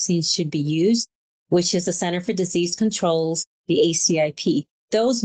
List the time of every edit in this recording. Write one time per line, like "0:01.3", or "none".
none